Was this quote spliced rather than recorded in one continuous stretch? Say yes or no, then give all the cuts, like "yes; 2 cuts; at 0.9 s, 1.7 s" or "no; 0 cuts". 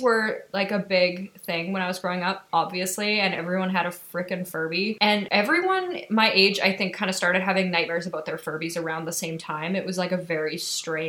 no; 0 cuts